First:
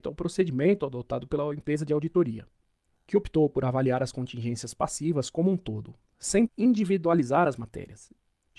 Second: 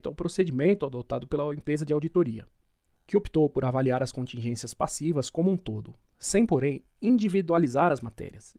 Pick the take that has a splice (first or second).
first